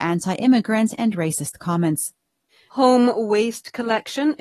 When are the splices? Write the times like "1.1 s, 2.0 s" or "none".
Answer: 2.7 s